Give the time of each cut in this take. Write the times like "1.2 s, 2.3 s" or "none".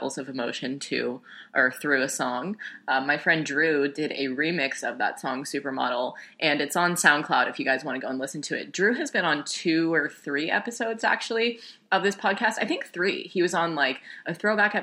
none

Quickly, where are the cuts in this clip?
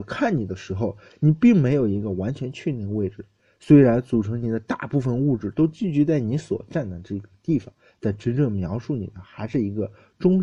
none

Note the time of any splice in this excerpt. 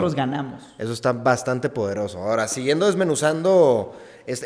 none

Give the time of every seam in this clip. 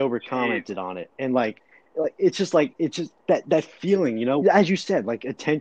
4.4 s

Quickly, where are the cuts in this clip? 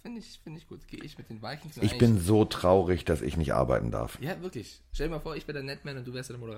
1.7 s

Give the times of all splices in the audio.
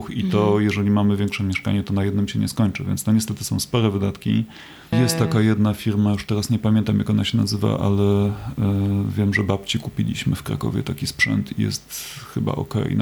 4.9 s

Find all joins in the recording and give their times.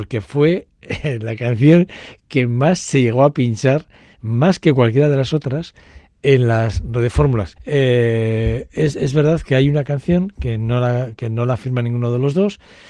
7.6 s

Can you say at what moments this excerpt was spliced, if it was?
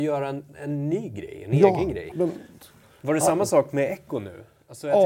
2.1 s

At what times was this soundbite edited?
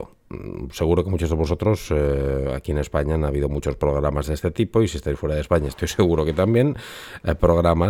none

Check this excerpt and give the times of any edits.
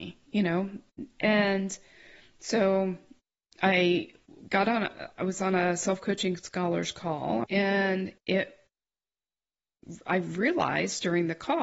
7.4 s

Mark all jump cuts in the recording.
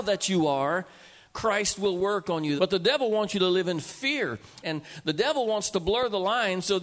2.6 s, 4.6 s

